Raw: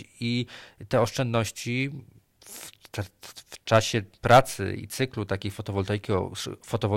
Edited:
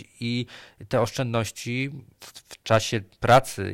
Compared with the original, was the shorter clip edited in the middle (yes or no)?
yes